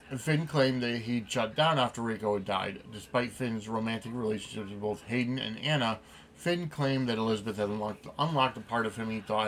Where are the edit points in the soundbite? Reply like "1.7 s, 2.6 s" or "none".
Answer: none